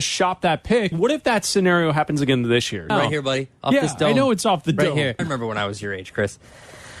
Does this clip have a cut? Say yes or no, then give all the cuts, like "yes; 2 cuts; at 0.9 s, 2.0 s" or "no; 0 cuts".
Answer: yes; 3 cuts; at 0.9 s, 2.9 s, 5.2 s